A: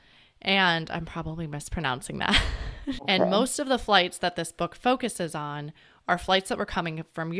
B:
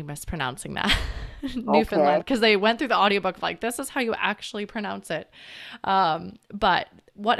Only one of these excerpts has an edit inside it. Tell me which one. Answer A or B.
A